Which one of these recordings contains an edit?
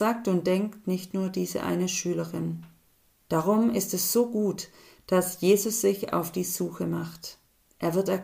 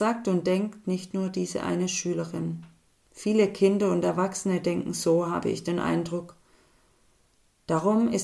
first; 1 cut; at 3.1 s

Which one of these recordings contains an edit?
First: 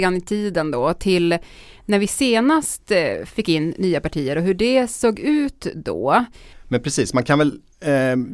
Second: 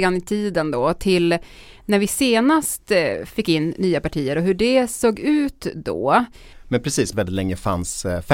second; 1 cut; at 7.1 s

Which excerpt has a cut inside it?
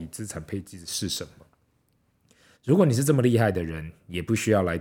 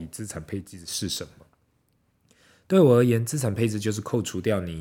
first; 1 cut; at 2.6 s

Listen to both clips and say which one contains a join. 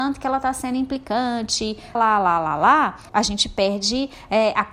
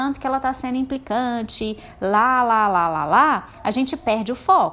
first; 2 cuts; at 1.9 s, 3.1 s

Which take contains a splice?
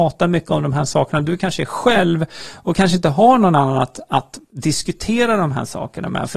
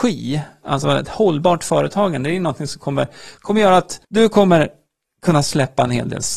second; 1 cut; at 4.0 s

